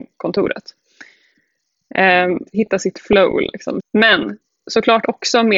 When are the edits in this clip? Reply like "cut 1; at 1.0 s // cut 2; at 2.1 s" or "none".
cut 1; at 2.5 s // cut 2; at 3.8 s